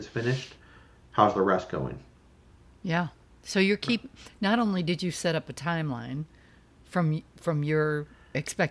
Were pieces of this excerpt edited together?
no; 0 cuts

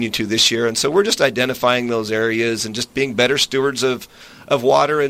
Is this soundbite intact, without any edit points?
yes; 0 cuts

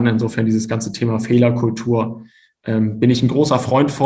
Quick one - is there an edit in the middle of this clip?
no; 0 cuts

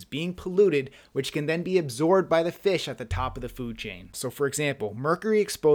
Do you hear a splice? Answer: yes; 1 cut; at 4.1 s

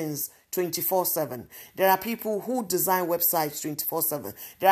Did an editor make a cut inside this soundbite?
no; 0 cuts

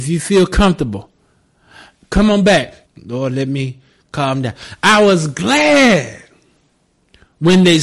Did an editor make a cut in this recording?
yes; 1 cut; at 2.8 s

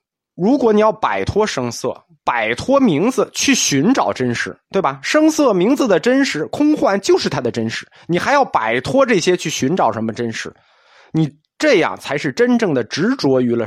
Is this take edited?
no; 0 cuts

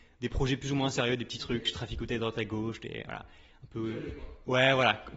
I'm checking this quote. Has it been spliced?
no; 0 cuts

